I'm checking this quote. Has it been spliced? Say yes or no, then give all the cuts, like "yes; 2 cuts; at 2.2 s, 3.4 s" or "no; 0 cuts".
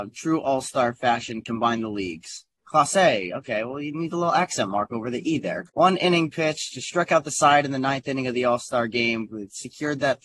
yes; 2 cuts; at 2.6 s, 5.7 s